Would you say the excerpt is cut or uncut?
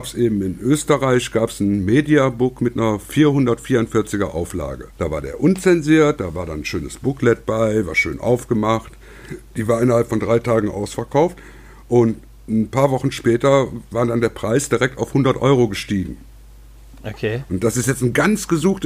cut